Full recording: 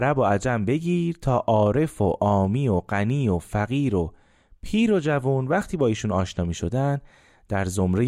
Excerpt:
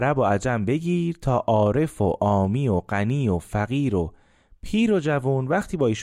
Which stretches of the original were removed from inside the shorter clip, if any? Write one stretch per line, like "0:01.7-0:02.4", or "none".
none